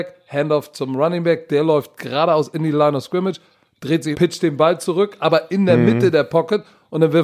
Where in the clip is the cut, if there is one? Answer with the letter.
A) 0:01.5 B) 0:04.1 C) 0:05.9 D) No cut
B